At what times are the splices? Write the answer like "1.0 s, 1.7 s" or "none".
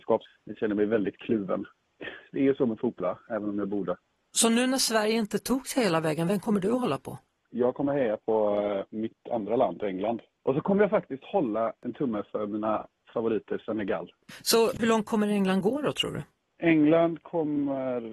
3.0 s